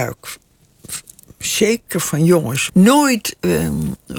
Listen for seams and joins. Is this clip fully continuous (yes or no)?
no